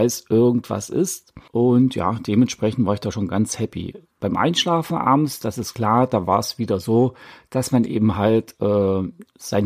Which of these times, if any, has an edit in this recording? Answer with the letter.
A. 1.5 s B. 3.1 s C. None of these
A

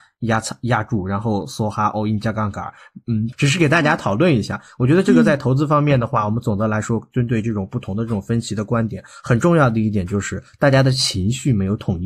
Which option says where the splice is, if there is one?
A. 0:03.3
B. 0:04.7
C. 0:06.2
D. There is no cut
A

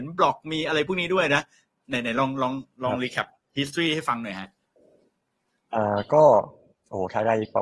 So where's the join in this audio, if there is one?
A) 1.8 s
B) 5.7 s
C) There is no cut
C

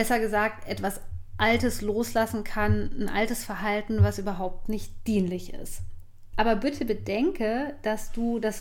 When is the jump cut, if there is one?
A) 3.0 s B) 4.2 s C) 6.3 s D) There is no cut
C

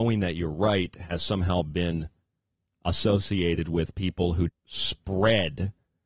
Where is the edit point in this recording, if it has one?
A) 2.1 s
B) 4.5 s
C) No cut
B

